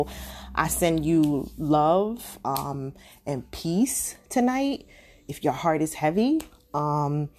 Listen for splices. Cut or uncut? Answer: uncut